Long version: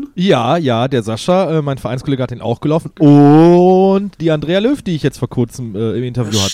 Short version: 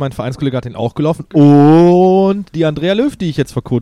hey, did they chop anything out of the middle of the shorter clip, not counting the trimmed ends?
no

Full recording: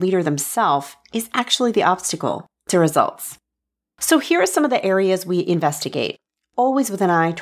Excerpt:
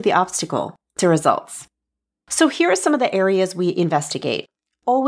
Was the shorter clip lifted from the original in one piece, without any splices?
yes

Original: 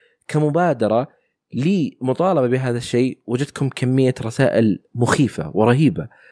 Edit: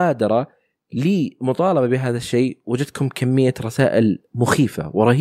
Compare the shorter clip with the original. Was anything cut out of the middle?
no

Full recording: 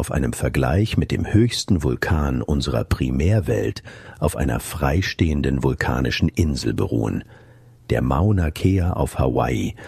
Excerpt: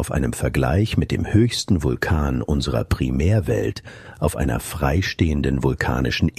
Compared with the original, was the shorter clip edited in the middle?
no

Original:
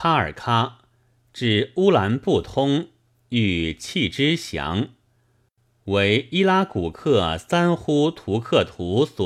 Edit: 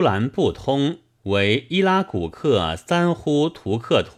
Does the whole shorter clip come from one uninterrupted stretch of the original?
no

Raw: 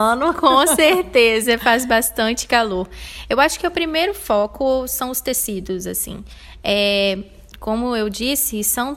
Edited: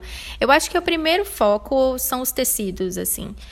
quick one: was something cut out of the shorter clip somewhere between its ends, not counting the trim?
no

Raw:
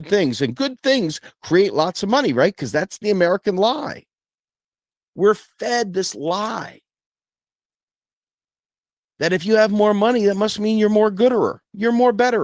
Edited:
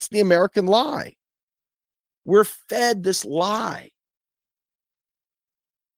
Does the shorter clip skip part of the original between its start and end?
no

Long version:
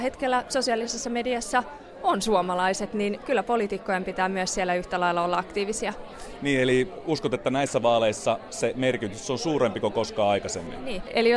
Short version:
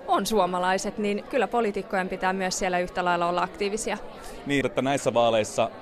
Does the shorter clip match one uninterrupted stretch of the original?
no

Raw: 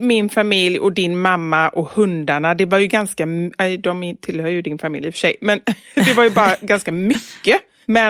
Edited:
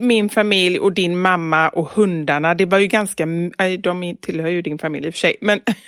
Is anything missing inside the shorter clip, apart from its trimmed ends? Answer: no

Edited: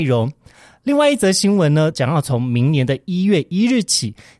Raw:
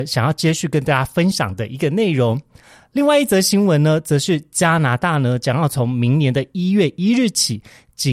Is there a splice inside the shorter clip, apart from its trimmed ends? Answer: yes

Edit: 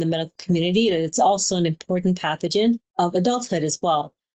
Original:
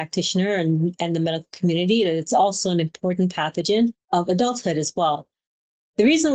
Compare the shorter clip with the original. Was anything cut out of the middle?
no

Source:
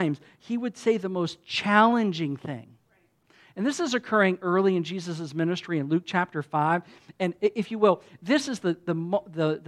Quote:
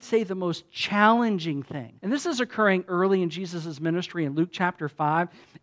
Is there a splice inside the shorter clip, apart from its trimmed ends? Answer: yes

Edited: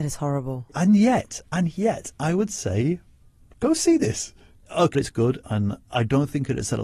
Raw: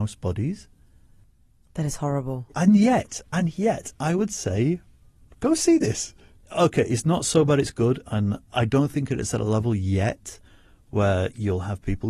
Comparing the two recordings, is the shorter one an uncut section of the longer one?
no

